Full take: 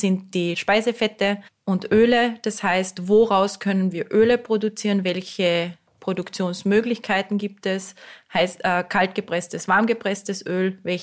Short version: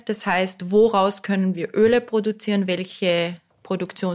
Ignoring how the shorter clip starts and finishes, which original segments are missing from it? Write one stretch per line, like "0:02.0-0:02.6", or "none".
none